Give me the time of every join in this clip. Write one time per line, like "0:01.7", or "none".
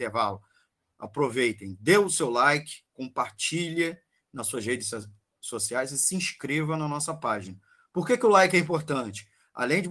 0:02.9